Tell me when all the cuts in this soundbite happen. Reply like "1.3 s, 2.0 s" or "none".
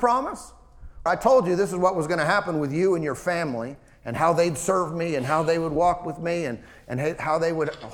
1.1 s